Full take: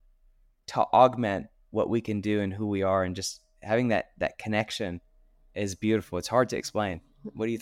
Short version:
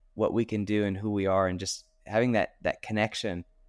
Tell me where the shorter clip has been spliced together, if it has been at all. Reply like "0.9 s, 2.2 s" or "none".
none